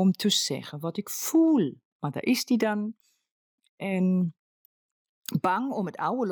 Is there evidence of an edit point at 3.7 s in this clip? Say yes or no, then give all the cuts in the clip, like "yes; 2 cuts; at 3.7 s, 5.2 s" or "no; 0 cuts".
no; 1 cut; at 2.0 s